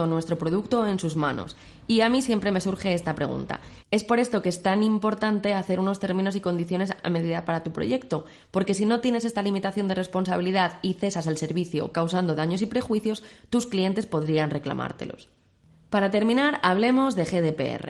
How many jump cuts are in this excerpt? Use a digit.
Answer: 1